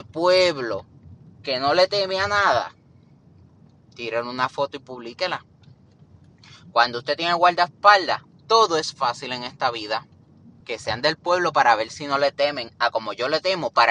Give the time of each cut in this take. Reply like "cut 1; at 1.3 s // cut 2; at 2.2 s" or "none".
cut 1; at 10.6 s